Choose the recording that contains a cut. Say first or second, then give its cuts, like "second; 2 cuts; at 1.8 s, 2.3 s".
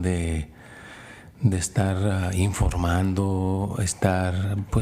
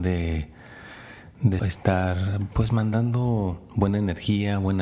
second; 1 cut; at 1.6 s